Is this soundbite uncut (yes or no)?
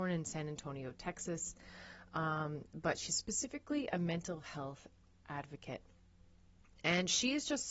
yes